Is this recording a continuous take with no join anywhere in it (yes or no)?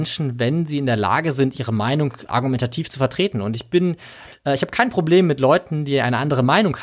yes